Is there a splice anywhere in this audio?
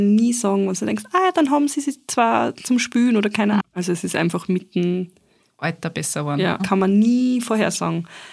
yes; 2 cuts; at 3.6 s, 6.6 s

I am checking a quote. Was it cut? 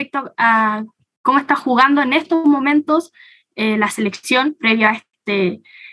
no; 0 cuts

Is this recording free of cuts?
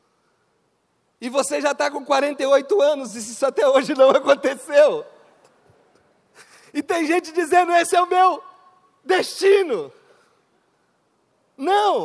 yes; 0 cuts

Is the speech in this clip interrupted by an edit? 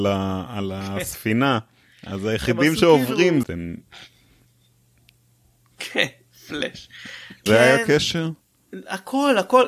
yes; 2 cuts; at 3.4 s, 7.5 s

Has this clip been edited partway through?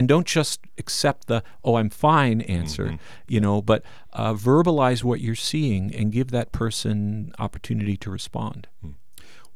no; 0 cuts

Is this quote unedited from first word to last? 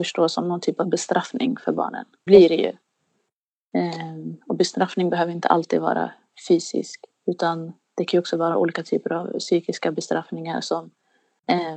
no; 1 cut; at 2.3 s

